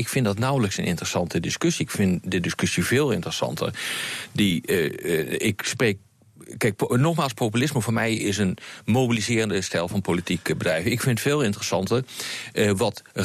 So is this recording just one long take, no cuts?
yes; 0 cuts

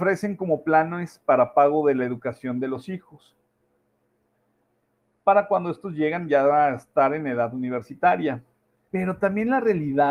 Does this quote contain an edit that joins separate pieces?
yes; 1 cut; at 8.9 s

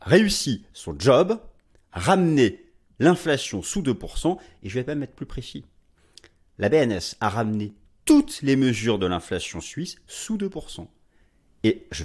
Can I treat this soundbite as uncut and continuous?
yes; 0 cuts

